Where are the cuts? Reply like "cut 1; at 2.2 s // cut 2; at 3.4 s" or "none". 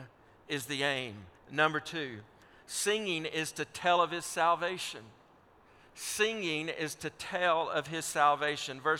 cut 1; at 1.4 s